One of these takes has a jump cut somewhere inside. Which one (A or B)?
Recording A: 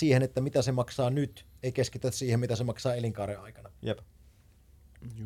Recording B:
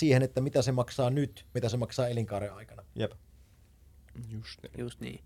B